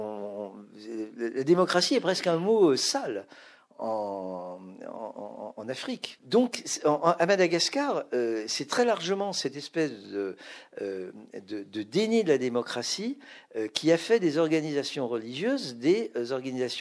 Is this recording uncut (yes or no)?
no